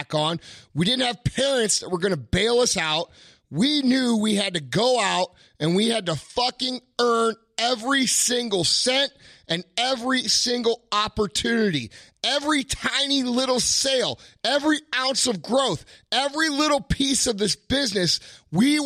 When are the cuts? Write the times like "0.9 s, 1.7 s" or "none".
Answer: none